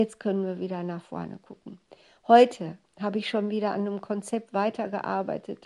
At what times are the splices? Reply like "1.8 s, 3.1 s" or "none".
none